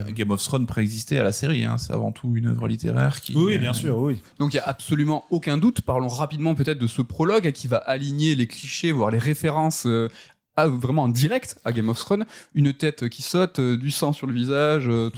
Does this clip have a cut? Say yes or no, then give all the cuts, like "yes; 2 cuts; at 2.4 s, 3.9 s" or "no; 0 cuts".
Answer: no; 0 cuts